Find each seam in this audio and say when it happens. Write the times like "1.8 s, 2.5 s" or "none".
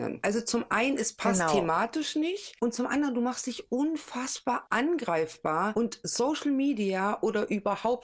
none